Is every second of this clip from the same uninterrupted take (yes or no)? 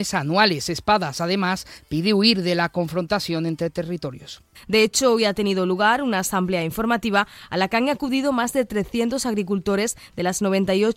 no